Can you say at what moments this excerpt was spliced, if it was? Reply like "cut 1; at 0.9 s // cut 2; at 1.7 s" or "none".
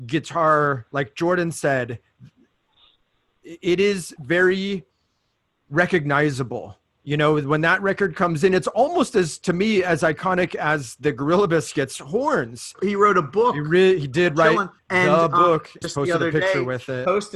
cut 1; at 12.7 s // cut 2; at 14.8 s // cut 3; at 15.8 s